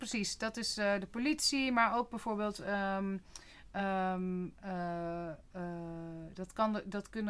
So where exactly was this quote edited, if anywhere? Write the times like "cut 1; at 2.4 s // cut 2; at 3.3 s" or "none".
none

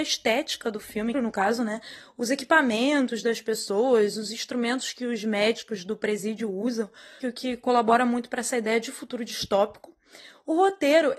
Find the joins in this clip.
cut 1; at 1.1 s // cut 2; at 7.2 s

